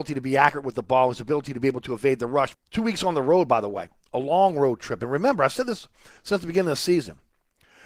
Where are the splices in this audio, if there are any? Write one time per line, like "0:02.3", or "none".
0:02.5